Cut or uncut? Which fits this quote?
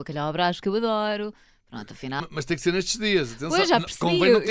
cut